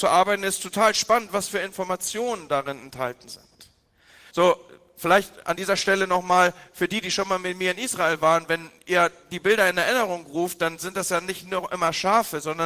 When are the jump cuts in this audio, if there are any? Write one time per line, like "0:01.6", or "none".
0:04.3